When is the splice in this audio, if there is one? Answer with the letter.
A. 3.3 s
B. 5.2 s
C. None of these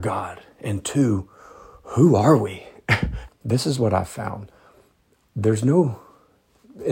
A